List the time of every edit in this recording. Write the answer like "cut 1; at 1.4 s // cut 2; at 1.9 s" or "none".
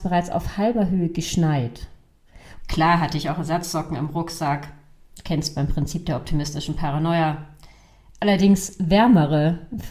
cut 1; at 2.6 s